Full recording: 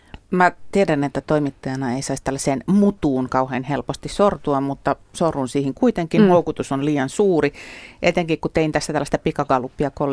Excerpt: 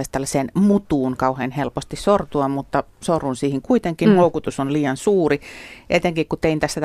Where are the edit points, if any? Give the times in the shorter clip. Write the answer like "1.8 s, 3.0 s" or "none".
none